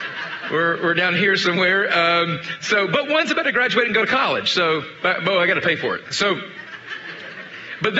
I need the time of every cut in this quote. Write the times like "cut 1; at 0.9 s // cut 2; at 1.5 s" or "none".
cut 1; at 6.1 s